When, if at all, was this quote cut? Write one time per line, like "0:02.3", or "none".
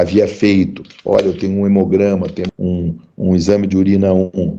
0:02.5